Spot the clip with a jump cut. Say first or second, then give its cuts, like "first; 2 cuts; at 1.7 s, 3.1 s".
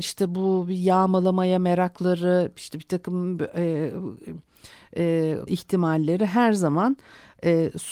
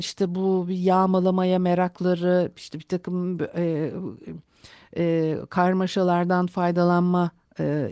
first; 1 cut; at 5.5 s